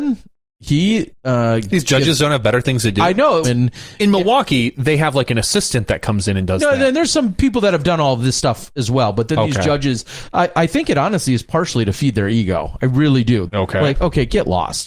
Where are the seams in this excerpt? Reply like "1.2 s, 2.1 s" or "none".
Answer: 3.4 s, 13.5 s